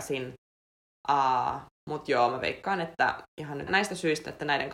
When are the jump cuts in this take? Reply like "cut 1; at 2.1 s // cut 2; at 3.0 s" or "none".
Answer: cut 1; at 3.7 s